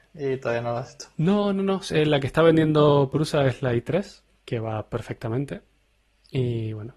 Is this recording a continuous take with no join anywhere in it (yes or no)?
yes